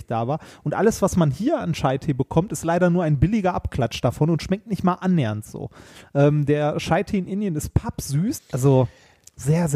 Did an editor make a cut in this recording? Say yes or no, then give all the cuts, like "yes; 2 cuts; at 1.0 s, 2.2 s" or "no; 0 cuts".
yes; 1 cut; at 8.4 s